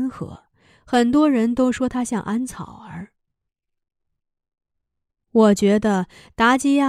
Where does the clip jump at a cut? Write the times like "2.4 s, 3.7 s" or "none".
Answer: 3.5 s